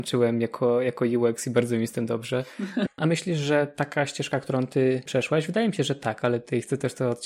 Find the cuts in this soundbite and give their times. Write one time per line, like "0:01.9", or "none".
0:02.9